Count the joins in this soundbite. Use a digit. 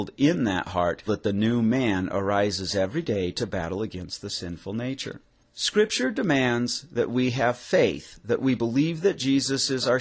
1